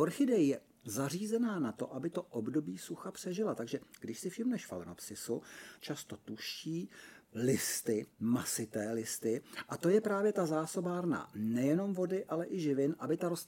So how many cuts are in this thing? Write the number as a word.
one